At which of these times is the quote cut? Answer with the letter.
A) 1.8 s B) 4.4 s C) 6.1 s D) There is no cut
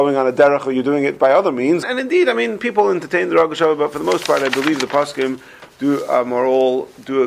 A